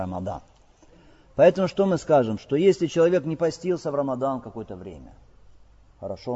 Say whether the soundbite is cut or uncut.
uncut